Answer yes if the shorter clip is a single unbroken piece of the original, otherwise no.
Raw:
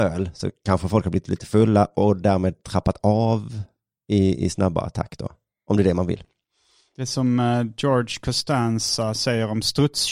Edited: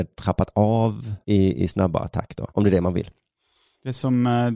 no